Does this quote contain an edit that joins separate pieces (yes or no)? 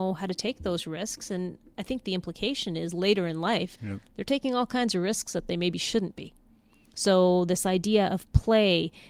yes